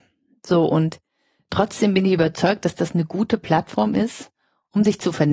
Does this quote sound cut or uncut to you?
uncut